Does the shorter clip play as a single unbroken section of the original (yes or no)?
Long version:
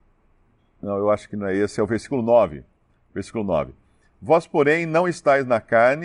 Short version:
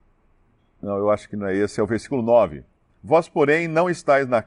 no